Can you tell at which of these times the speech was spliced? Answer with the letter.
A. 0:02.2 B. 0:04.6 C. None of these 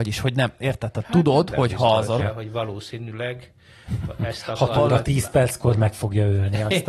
A